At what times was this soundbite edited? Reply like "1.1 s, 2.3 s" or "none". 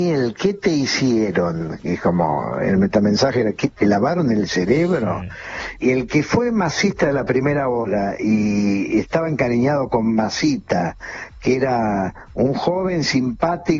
5.8 s